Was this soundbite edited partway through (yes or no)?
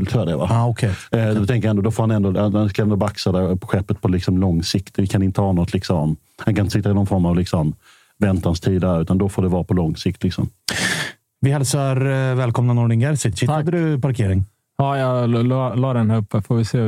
no